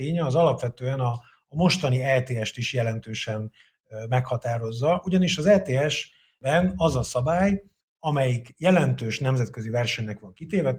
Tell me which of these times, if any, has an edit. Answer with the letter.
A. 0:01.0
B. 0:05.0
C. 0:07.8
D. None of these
C